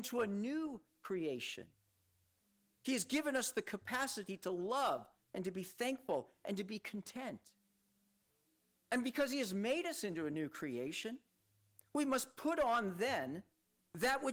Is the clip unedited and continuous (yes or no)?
yes